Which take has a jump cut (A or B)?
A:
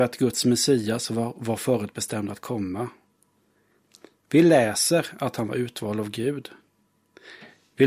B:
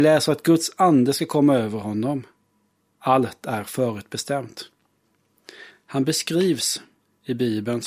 B